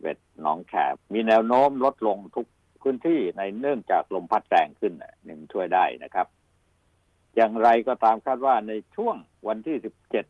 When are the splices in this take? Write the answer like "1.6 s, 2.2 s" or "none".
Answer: 1.0 s